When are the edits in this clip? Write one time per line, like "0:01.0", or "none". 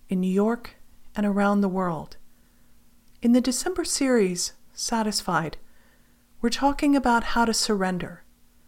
0:03.1